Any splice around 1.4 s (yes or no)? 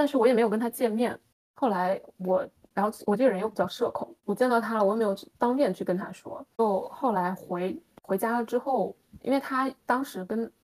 yes